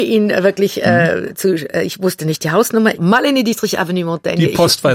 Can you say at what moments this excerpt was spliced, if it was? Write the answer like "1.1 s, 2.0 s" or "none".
3.0 s